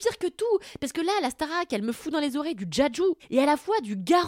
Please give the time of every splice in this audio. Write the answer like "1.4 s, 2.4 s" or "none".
3.2 s